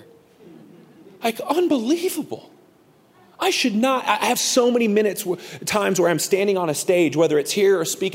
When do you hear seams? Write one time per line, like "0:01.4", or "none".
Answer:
none